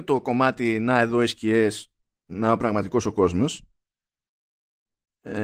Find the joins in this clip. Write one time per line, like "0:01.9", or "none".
none